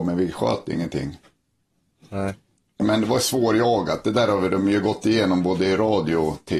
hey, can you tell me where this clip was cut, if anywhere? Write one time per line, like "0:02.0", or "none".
0:02.8